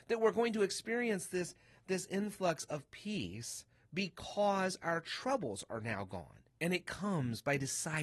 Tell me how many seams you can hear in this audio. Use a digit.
1